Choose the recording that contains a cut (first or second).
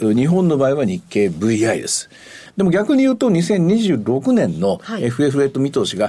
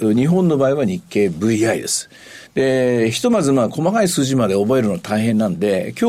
first